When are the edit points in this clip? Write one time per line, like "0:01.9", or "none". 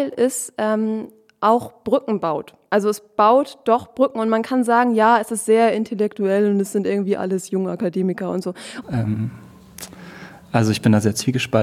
0:08.8

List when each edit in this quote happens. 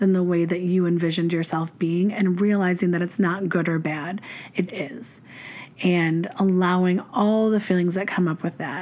0:04.7

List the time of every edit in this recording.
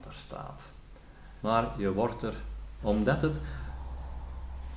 0:01.4
0:02.8

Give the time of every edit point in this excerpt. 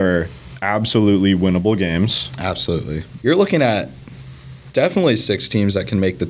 0:03.2

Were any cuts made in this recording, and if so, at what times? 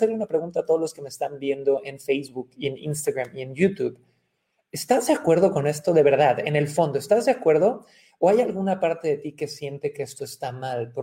none

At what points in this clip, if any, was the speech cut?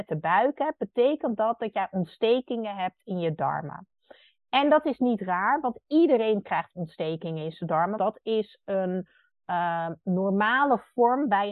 0:08.0

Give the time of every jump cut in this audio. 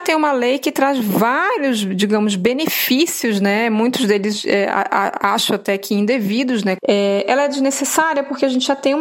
0:06.8

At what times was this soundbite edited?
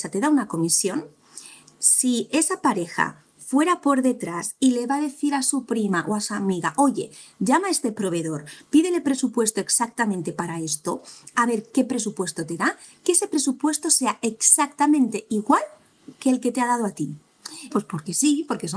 0:17.7

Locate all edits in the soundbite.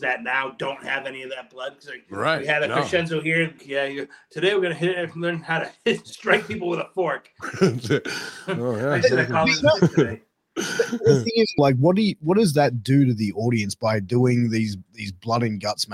0:03.6
0:11.6

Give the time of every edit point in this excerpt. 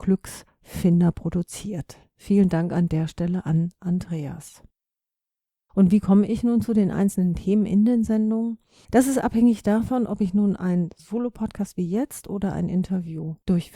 0:05.7
0:08.8

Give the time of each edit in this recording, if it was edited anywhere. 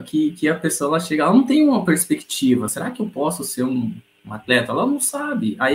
none

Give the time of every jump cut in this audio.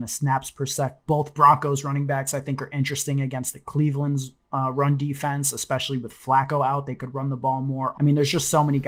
0:01.1
0:07.9

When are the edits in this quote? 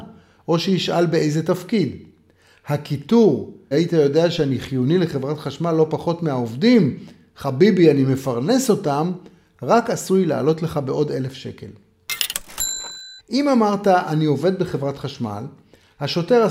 0:03.7
0:13.2

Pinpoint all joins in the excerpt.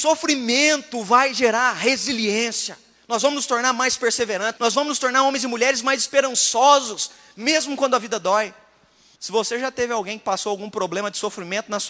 0:04.6
0:09.2

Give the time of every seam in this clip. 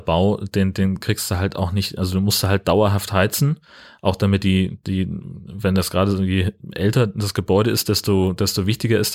none

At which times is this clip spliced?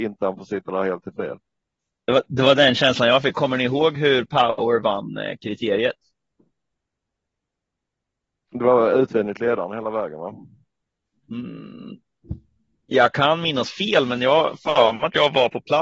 none

